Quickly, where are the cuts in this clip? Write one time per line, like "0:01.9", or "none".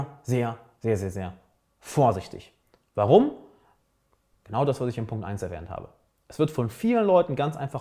none